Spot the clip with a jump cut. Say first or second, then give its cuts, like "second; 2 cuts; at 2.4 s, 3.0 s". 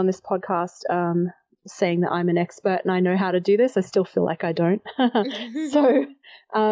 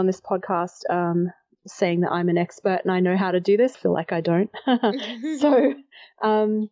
second; 1 cut; at 3.7 s